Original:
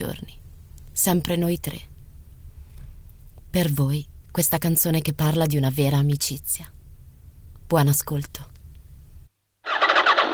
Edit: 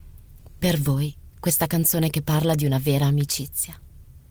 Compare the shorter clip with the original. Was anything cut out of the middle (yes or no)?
no